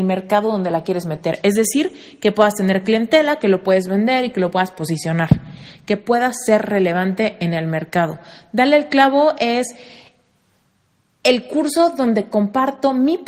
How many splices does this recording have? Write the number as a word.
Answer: zero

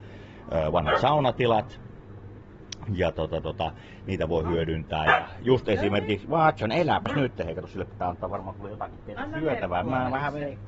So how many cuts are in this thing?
zero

